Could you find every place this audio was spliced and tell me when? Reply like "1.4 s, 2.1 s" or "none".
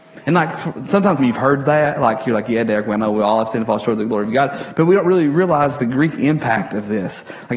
1.2 s, 5.8 s